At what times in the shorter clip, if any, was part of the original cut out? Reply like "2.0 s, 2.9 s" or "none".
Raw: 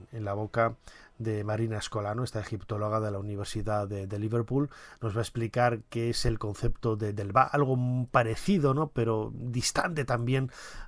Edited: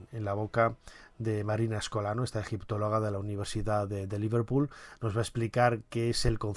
none